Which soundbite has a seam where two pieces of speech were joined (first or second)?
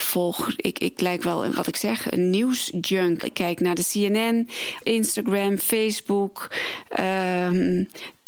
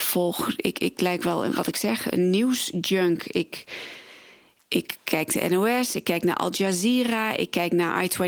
first